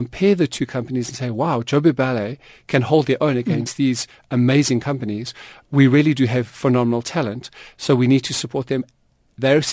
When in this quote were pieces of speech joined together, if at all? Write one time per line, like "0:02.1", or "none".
none